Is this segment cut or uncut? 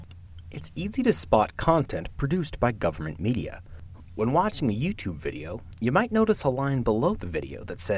uncut